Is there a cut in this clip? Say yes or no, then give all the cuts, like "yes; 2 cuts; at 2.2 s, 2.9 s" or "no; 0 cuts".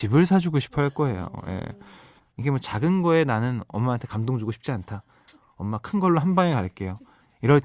no; 0 cuts